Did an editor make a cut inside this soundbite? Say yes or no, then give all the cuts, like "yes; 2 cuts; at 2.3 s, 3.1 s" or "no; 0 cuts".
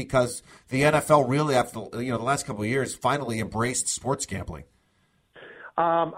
no; 0 cuts